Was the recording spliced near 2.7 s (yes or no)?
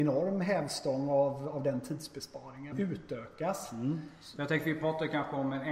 yes